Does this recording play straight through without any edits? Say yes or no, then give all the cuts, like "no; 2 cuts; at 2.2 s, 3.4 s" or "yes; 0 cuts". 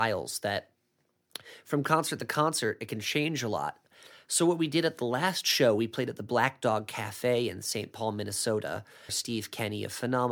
no; 1 cut; at 9.1 s